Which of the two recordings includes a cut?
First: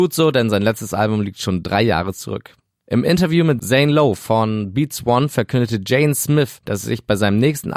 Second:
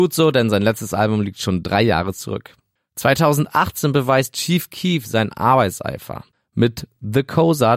second; 1 cut; at 2.8 s

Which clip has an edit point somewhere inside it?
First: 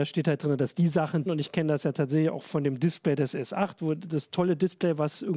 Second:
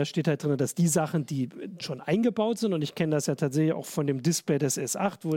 first; 1 cut; at 1.3 s

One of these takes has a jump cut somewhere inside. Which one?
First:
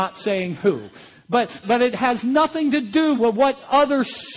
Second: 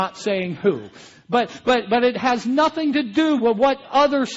first; 1 cut; at 1.6 s

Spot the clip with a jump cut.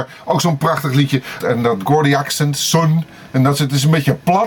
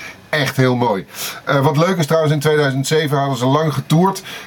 first; 1 cut; at 1.4 s

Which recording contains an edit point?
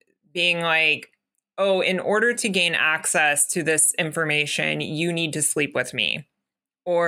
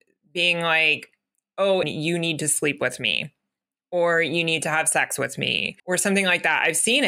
second; 2 cuts; at 1.8 s, 5.8 s

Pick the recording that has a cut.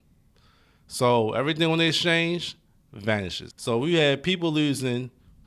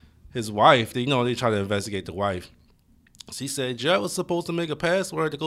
first; 1 cut; at 3.5 s

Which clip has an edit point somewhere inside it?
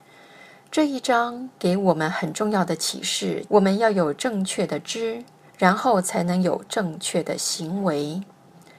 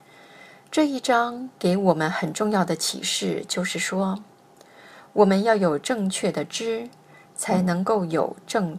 first; 2 cuts; at 3.5 s, 5.5 s

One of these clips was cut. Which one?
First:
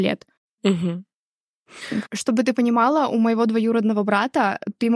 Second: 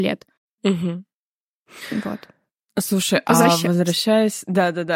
first; 1 cut; at 2.0 s

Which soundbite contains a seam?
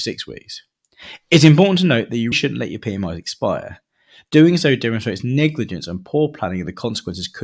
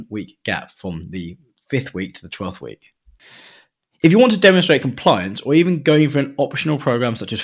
first; 1 cut; at 2.3 s

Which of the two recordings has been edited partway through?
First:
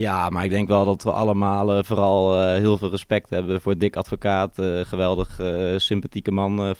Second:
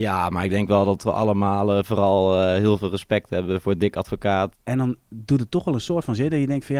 second; 1 cut; at 4.5 s

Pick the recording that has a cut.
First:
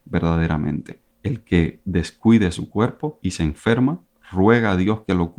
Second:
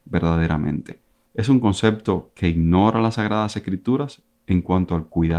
first; 1 cut; at 1.1 s

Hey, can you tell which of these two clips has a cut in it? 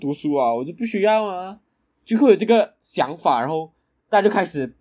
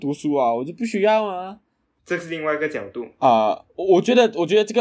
second; 1 cut; at 2.0 s

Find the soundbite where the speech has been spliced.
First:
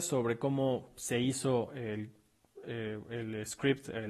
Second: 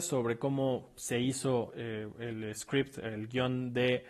second; 1 cut; at 1.7 s

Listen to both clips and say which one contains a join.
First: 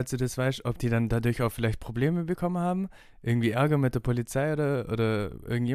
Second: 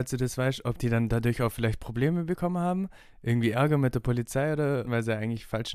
second; 1 cut; at 4.8 s

